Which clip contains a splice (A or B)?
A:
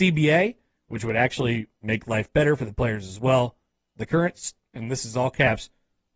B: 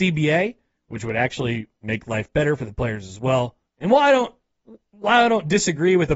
B